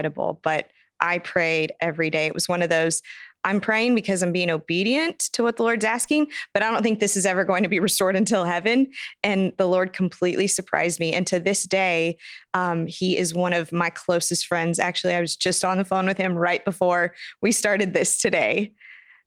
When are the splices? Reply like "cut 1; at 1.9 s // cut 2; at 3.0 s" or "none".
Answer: none